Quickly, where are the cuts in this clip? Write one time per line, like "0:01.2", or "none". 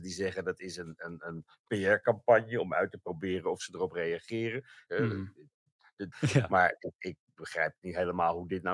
0:04.9
0:06.1